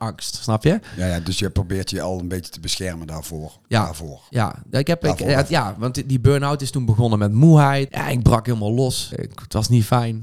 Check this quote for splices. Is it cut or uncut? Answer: cut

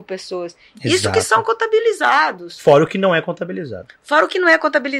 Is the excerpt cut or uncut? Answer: uncut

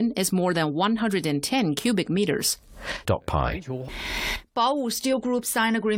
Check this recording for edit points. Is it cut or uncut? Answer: cut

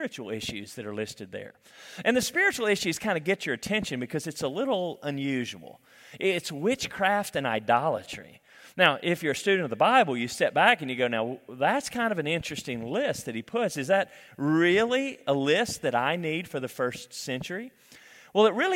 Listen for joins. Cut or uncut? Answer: uncut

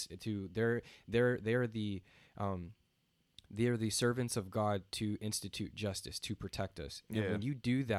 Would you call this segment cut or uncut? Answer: uncut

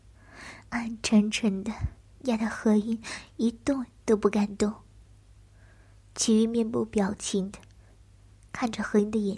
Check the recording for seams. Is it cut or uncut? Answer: uncut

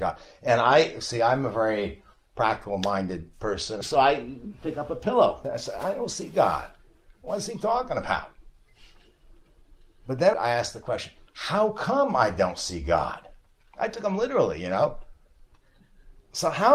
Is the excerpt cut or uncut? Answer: uncut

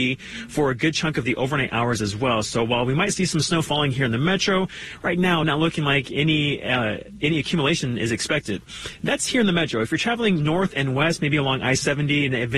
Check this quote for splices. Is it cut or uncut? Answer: uncut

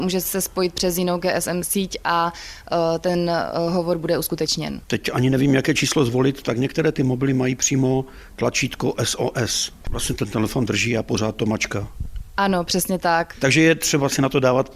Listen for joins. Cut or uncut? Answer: cut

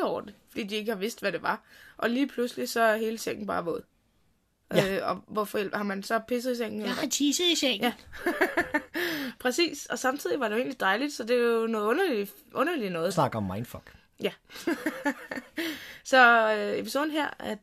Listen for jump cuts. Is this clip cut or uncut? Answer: cut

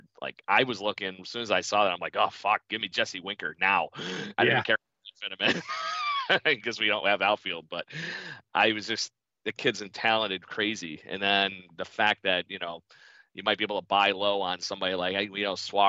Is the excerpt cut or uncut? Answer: uncut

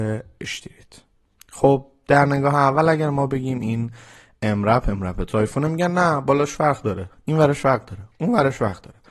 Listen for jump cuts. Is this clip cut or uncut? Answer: uncut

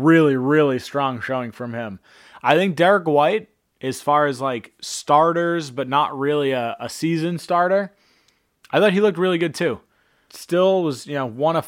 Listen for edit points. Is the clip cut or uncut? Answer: cut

